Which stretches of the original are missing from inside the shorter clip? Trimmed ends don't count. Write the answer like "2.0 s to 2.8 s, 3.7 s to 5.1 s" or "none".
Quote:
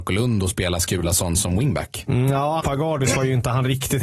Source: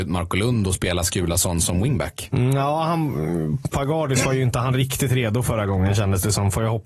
2.8 s to 3.7 s